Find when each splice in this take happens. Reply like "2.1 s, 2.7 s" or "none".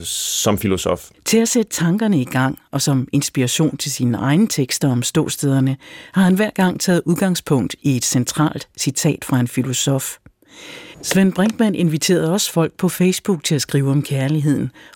1.1 s, 10.9 s